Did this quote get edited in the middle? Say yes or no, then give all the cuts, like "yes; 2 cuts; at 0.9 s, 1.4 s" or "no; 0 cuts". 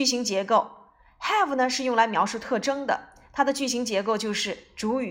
no; 0 cuts